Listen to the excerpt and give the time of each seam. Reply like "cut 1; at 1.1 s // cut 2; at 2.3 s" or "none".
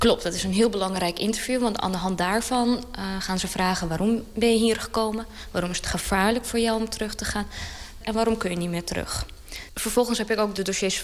cut 1; at 8.0 s // cut 2; at 9.7 s